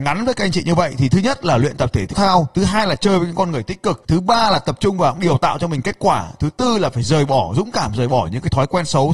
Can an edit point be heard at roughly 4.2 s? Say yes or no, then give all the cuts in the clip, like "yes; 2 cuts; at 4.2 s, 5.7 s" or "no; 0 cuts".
no; 1 cut; at 2.1 s